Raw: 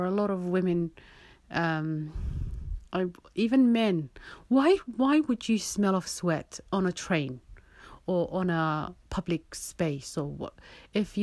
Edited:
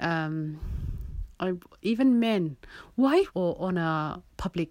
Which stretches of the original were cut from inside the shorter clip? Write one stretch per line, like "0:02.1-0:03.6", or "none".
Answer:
0:04.8-0:08.0